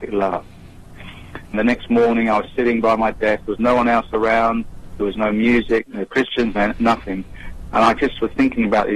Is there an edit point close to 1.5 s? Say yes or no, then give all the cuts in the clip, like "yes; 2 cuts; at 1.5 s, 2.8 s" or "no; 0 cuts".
yes; 1 cut; at 1.5 s